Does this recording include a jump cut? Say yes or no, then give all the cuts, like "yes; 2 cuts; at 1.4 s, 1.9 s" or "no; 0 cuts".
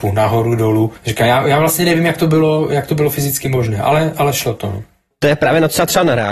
no; 0 cuts